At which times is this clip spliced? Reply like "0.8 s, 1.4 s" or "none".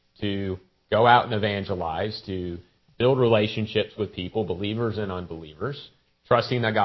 none